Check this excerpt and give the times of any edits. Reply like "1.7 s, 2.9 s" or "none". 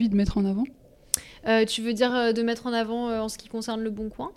none